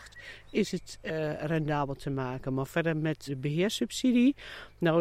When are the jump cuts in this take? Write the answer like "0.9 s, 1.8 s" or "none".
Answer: 3.3 s